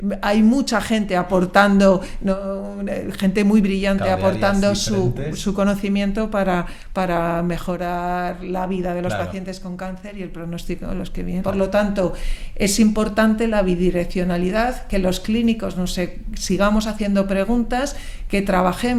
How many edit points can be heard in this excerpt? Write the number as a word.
one